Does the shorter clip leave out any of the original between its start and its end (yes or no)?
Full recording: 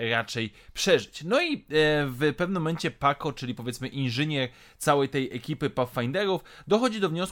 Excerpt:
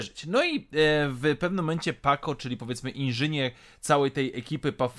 no